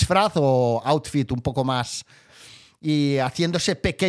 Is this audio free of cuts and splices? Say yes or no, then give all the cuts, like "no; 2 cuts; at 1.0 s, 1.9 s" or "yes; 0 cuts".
no; 1 cut; at 2.3 s